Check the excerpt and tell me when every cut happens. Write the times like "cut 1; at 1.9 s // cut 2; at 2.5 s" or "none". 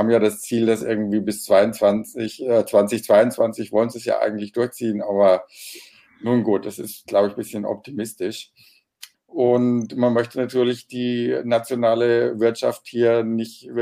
cut 1; at 9.1 s